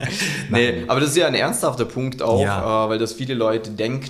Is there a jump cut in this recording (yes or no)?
no